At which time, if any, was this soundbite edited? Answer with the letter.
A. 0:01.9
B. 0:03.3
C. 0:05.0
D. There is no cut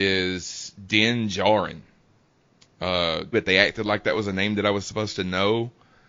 B